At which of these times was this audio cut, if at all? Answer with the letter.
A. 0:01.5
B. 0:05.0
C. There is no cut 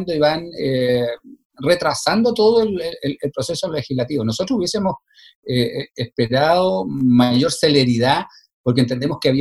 C